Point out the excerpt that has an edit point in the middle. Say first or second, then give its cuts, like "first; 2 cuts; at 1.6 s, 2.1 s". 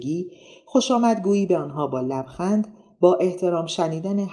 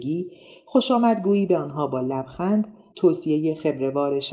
second; 1 cut; at 2.9 s